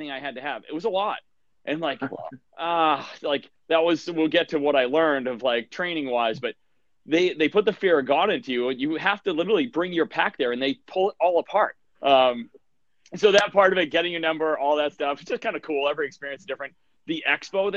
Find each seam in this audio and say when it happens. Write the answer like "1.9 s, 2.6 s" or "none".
11.9 s